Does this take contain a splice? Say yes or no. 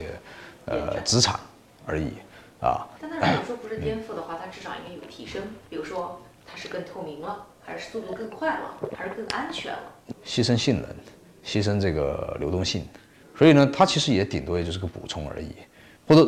yes